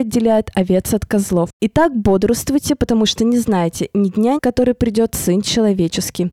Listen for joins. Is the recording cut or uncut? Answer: cut